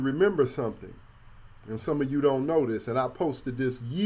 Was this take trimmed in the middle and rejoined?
no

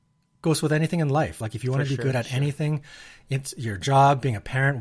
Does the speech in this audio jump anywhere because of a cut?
no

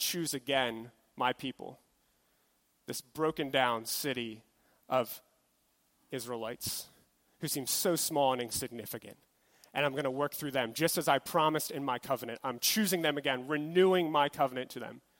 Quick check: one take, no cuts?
yes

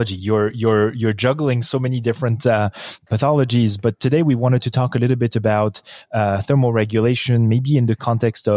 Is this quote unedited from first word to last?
no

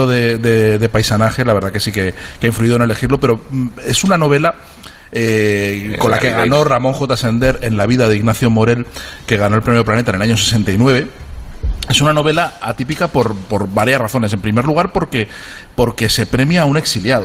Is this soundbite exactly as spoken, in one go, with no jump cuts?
yes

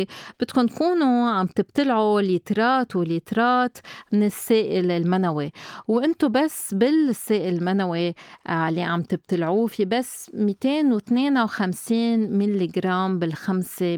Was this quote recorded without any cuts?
no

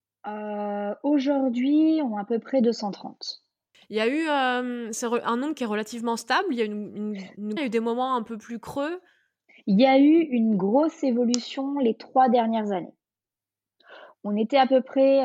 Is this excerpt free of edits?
no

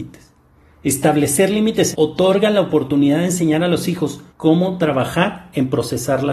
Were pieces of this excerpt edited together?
yes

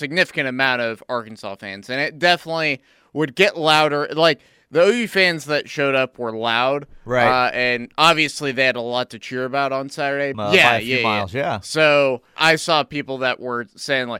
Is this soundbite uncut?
no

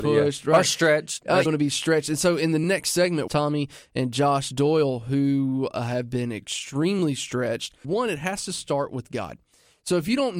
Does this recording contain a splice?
yes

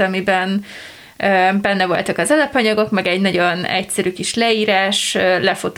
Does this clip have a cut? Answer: no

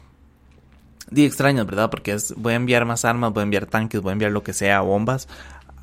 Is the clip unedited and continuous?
yes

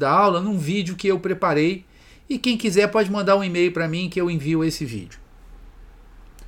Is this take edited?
no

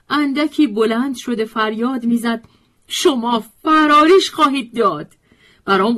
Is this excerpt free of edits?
yes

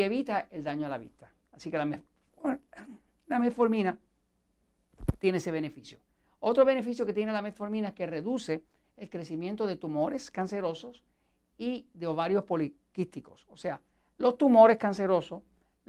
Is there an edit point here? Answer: no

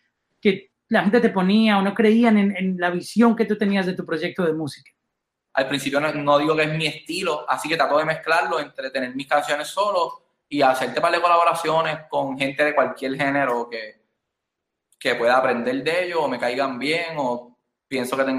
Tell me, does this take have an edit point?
yes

